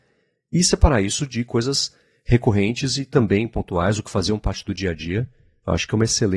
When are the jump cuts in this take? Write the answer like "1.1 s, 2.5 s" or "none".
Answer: none